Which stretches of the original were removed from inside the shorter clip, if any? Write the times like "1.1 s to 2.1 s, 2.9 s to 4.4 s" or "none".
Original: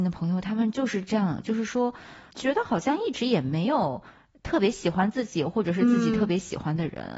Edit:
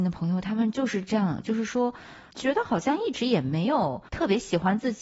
4.1 s to 4.4 s